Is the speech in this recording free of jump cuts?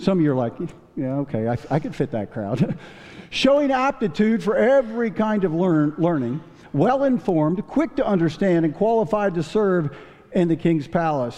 yes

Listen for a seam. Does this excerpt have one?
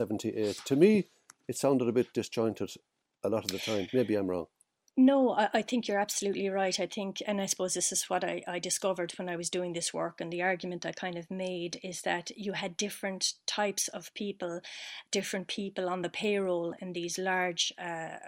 no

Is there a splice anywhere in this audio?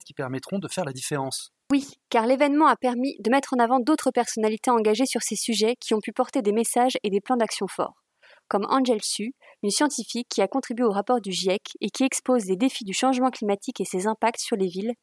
no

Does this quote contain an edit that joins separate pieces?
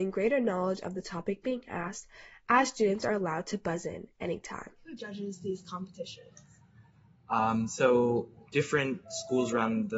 yes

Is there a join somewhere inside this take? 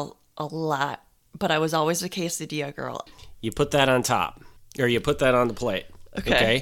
yes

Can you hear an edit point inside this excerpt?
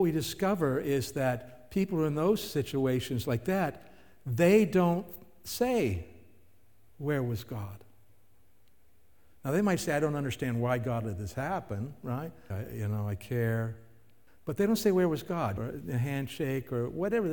yes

